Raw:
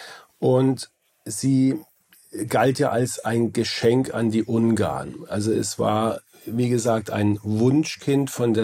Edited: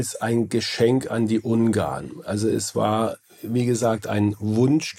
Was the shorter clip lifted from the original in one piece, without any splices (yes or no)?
yes